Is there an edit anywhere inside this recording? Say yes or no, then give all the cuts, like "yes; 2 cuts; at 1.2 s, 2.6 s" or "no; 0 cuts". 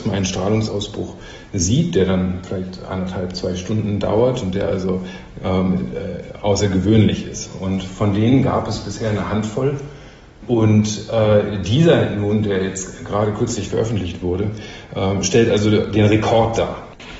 no; 0 cuts